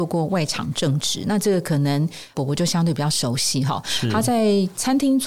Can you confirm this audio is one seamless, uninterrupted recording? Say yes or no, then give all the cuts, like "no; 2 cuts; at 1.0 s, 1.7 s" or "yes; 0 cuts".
yes; 0 cuts